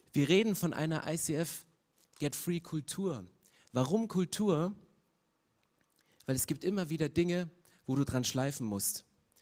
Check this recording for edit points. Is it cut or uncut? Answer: uncut